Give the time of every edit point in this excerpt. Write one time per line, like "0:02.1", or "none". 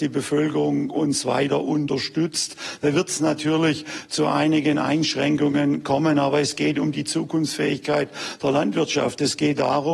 none